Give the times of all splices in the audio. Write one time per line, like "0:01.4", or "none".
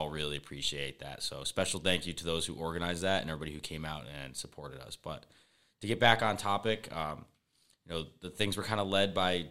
none